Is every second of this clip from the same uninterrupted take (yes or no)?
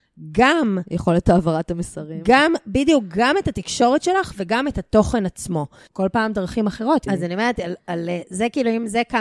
no